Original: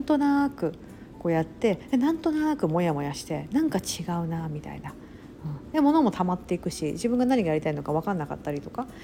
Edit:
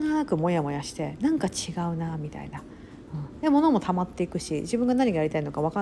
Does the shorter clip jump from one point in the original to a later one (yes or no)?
no